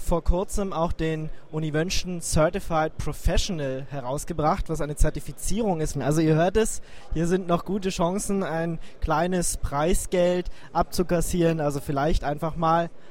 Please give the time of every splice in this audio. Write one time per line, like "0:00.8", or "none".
0:05.9